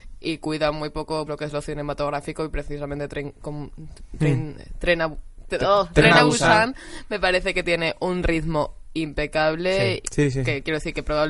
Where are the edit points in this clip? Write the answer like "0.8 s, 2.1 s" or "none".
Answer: 1.3 s, 10.0 s